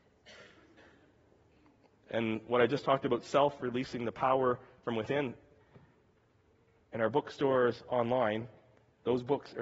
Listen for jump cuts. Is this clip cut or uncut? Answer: uncut